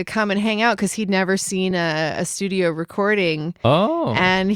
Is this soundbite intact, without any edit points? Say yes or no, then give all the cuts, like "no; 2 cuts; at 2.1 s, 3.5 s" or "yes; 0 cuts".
yes; 0 cuts